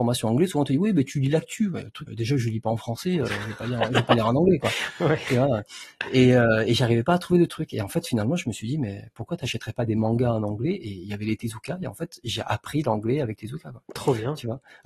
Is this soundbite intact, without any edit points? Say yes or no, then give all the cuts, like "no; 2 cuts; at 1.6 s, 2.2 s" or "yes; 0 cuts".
no; 1 cut; at 2.1 s